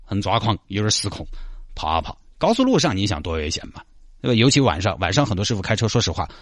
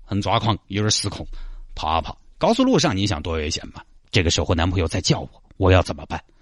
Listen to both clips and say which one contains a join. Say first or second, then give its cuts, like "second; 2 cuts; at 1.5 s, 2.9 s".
second; 1 cut; at 4.0 s